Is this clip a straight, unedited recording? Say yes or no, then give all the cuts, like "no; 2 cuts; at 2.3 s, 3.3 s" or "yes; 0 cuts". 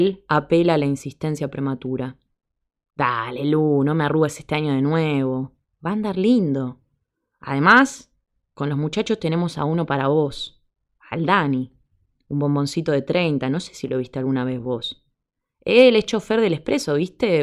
yes; 0 cuts